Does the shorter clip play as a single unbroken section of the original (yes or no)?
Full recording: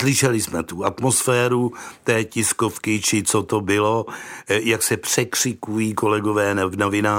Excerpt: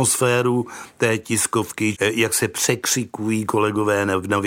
no